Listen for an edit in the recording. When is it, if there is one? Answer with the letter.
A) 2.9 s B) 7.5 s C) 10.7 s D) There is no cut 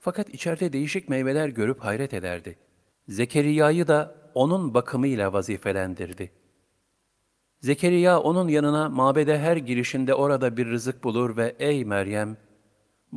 A